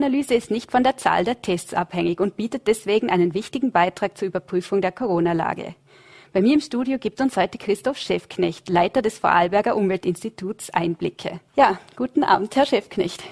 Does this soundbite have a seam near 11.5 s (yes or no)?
yes